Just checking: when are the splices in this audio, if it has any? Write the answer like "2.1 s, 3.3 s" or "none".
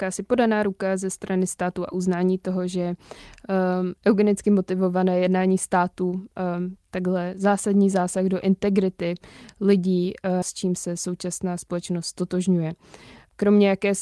10.4 s